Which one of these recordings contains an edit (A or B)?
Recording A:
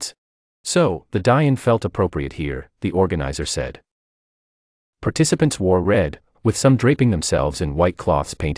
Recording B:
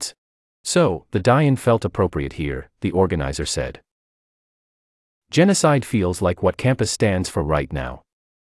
A